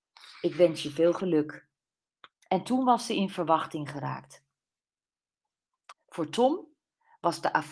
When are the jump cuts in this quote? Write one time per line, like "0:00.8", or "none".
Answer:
0:02.3
0:05.9